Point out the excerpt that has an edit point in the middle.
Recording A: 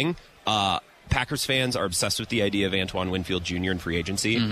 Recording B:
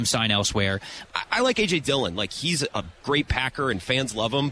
B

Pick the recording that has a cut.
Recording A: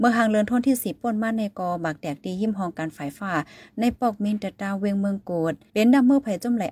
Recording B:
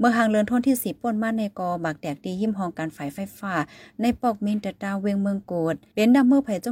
A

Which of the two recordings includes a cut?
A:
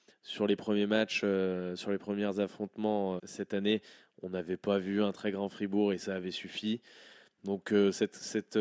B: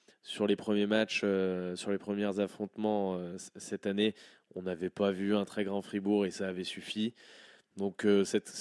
A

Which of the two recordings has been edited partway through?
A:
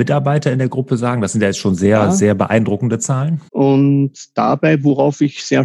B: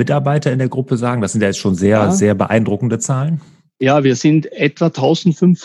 A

